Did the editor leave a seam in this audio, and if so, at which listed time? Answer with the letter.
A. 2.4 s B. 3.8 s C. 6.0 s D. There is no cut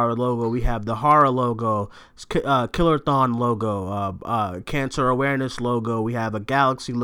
D